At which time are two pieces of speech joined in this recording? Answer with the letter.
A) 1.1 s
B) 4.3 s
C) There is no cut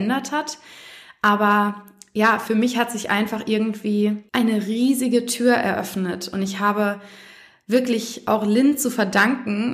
B